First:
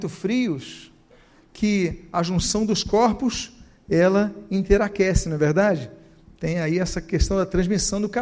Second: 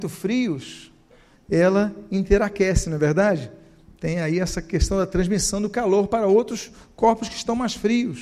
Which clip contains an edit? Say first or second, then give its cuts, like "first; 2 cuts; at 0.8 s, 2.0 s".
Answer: second; 1 cut; at 1.3 s